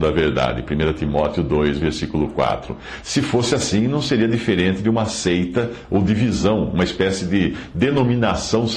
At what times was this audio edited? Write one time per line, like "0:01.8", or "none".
0:03.0

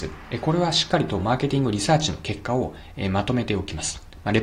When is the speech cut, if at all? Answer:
none

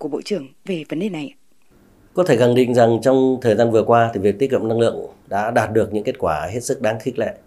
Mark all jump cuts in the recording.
none

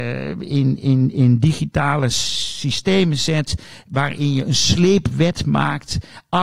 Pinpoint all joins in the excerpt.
none

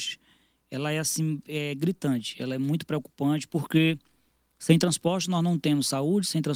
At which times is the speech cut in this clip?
none

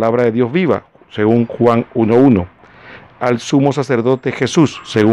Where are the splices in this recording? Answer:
none

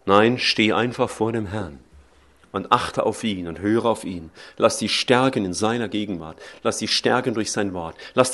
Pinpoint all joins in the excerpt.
none

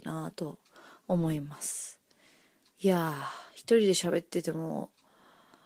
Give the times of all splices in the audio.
0:02.7

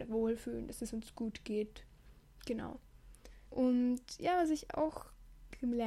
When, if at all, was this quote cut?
0:03.5

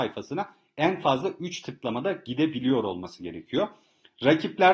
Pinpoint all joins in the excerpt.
none

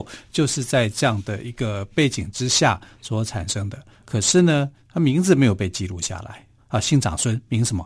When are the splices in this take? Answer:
0:04.0
0:06.6

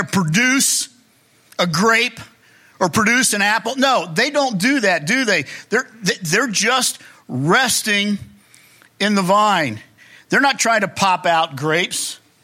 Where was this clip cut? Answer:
none

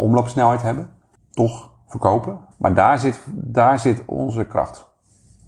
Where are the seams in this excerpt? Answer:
0:02.5

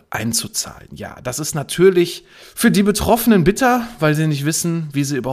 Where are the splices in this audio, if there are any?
none

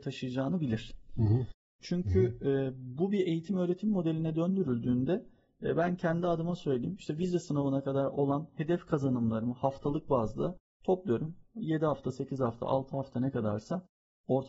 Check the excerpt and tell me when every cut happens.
0:01.8

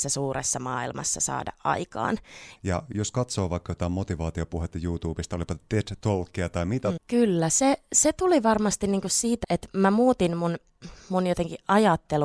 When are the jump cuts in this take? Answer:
0:02.6
0:07.0
0:09.4

